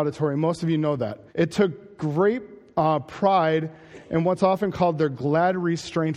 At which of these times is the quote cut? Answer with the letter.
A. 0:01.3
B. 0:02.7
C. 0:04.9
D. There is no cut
A